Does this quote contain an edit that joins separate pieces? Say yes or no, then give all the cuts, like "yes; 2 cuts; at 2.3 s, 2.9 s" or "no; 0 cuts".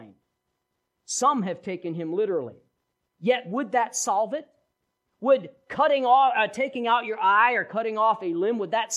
no; 0 cuts